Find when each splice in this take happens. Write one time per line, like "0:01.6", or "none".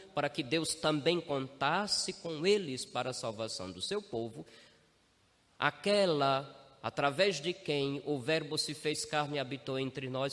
none